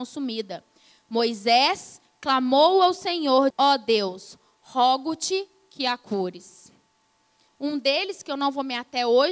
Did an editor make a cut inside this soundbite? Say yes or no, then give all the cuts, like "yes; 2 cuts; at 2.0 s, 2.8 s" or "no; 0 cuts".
yes; 2 cuts; at 3.5 s, 7.5 s